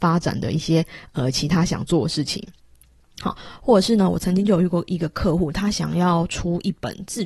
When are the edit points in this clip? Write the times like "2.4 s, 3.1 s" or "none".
none